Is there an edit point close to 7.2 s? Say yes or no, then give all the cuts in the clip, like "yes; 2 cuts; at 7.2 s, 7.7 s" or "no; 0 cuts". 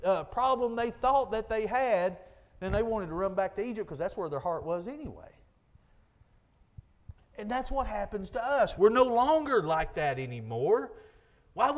no; 1 cut; at 8.8 s